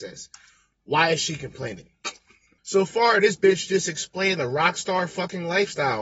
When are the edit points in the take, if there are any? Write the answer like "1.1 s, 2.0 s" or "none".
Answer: 2.6 s